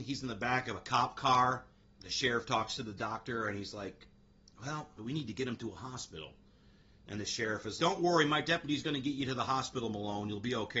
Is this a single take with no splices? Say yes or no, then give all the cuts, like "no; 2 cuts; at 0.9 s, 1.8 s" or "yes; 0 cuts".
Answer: no; 2 cuts; at 5.0 s, 7.8 s